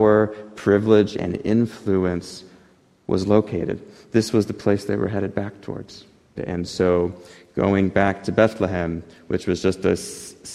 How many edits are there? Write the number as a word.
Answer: one